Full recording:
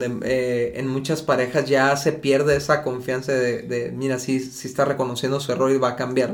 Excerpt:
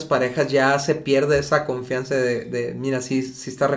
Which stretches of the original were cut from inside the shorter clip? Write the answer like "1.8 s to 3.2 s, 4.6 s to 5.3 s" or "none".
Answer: none